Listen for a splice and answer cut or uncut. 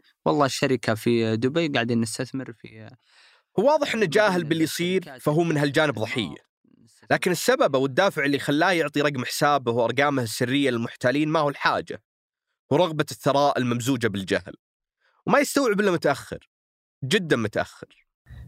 uncut